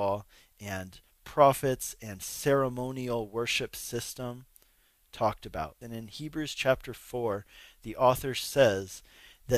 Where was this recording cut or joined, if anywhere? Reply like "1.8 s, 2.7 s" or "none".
5.8 s